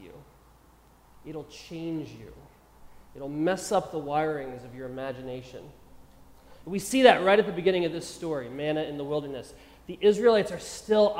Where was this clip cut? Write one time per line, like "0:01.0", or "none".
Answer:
none